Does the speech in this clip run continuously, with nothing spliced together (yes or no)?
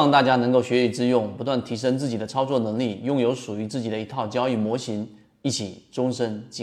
yes